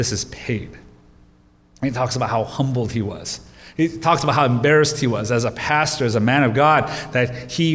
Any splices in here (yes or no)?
no